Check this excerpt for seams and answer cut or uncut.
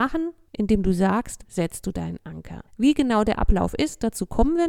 cut